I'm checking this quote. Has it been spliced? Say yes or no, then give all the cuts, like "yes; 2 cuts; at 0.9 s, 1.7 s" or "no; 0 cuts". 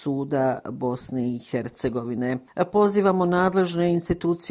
no; 0 cuts